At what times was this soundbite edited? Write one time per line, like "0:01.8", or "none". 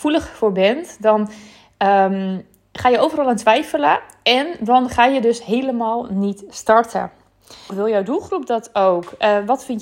0:07.7